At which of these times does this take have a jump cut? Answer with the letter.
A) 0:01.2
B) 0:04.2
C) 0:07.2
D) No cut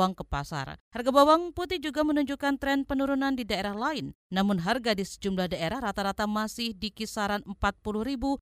D